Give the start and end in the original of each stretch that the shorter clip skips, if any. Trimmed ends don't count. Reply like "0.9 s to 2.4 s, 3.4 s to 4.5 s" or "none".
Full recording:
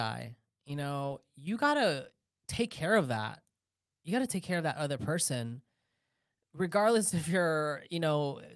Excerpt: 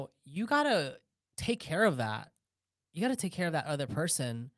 none

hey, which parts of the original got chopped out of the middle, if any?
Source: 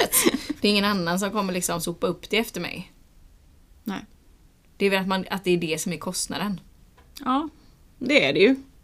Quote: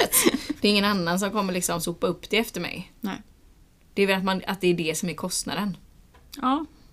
3.0 s to 3.8 s

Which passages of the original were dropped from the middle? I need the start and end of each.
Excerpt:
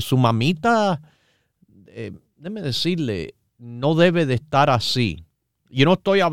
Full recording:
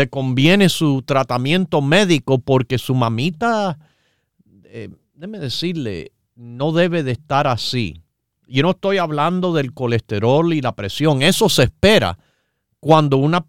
none

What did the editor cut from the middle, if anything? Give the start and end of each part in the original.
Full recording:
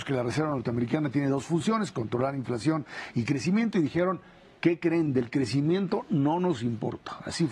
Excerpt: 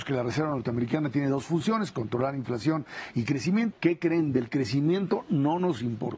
3.7 s to 4.5 s

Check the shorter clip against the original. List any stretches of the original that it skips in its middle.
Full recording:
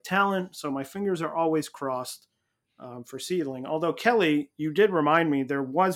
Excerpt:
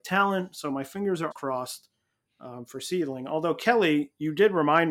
1.3 s to 1.7 s

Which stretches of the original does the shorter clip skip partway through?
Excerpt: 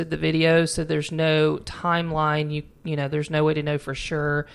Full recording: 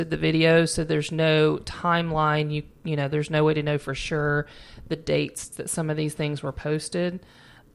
none

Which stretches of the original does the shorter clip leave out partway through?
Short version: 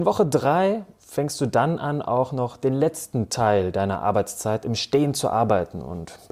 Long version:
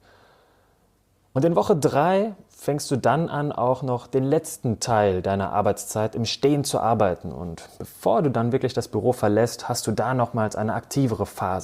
none

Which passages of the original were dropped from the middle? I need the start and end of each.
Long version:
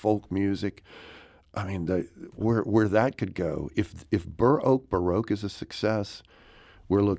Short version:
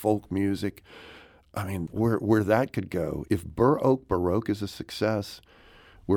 1.9 s to 2.3 s, 3.7 s to 4.1 s

